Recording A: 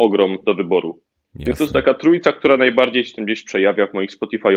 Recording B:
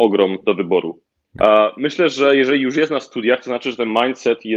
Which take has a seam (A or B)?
B